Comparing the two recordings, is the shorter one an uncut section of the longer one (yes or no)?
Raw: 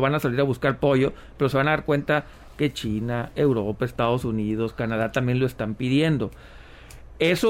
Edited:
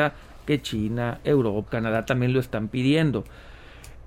no